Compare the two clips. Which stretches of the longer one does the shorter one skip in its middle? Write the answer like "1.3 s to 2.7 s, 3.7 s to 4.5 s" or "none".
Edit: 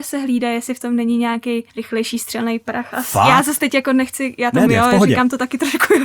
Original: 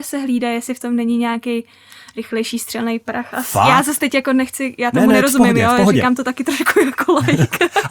1.7 s to 2.1 s, 5.1 s to 5.5 s